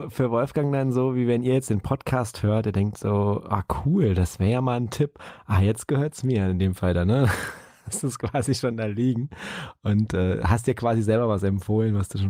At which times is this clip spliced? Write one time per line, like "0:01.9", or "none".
none